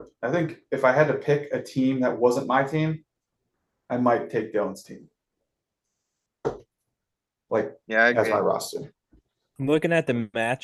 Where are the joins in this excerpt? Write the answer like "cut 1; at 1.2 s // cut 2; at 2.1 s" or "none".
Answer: none